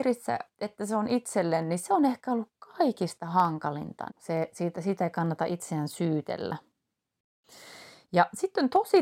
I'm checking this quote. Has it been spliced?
yes; 1 cut; at 4.1 s

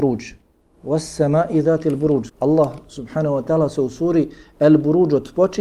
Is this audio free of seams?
no; 1 cut; at 2.3 s

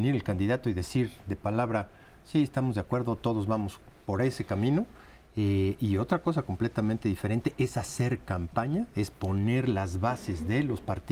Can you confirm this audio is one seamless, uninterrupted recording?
yes; 0 cuts

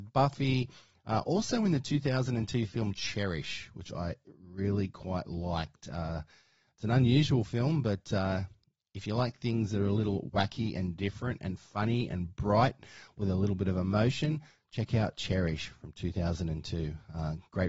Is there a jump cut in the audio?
no; 0 cuts

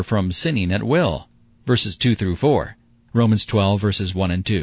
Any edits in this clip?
yes; 2 cuts; at 1.6 s, 3.1 s

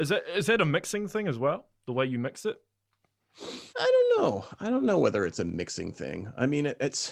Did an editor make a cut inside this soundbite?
yes; 1 cut; at 3.7 s

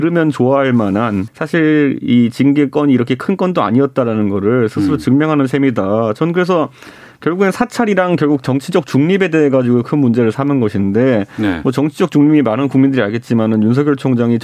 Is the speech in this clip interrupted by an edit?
yes; 1 cut; at 1.3 s

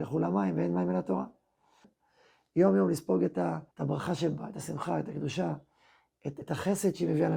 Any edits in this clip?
yes; 3 cuts; at 1.8 s, 3.7 s, 6.4 s

